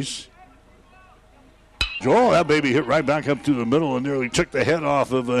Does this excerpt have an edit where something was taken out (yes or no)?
yes